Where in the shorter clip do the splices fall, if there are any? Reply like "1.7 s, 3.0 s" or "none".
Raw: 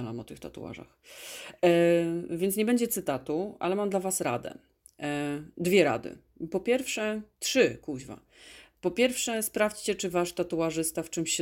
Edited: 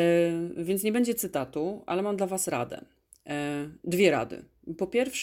none